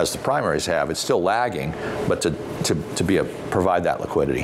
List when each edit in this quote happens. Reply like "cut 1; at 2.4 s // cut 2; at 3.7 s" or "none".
none